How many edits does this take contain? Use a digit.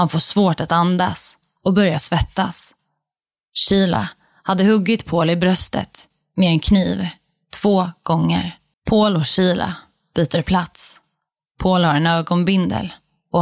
1